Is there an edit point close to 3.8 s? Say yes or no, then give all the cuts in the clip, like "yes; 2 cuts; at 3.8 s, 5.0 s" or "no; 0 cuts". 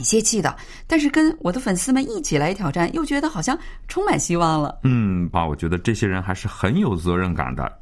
no; 1 cut; at 5.3 s